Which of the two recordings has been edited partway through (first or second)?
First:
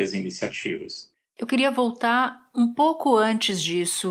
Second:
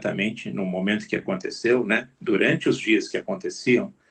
first